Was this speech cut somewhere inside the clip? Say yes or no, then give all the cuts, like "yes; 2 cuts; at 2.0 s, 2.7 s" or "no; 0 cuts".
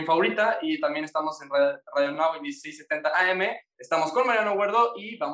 no; 0 cuts